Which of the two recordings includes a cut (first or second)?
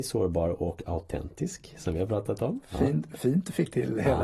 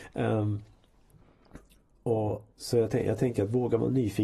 second